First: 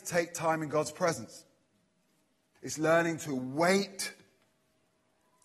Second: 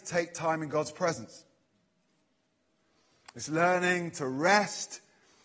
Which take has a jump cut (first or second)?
first